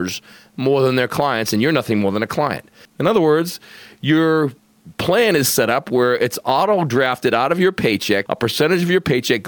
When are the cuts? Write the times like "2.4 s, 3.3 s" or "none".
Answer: 2.9 s, 8.3 s